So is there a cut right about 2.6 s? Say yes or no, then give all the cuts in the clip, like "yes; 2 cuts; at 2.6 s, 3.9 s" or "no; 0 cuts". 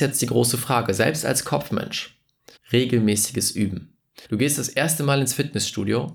yes; 2 cuts; at 2.6 s, 4.2 s